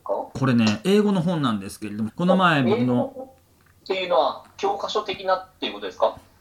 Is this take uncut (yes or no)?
no